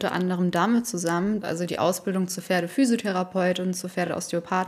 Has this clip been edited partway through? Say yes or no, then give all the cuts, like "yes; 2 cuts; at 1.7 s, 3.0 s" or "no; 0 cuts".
yes; 1 cut; at 1.4 s